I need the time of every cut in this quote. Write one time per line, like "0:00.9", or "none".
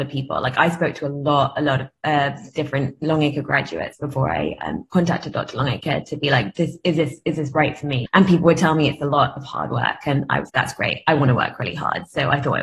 0:08.1
0:10.5